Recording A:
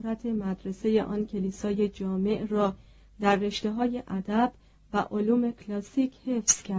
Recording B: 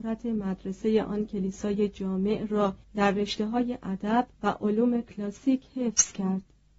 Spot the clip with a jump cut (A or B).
B